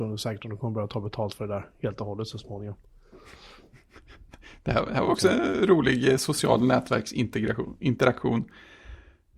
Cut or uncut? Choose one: uncut